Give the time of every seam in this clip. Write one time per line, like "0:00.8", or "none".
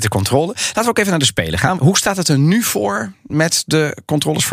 0:01.7